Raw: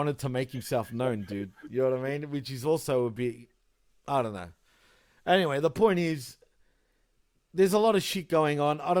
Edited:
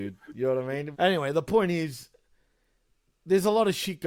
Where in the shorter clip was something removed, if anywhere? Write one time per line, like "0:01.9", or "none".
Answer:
0:00.9